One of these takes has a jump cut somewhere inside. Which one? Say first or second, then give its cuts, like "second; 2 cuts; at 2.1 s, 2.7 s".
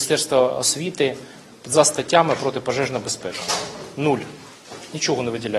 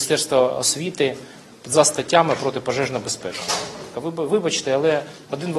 second; 1 cut; at 3.9 s